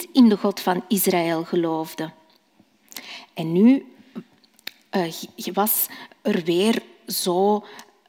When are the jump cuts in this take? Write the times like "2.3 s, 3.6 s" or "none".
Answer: none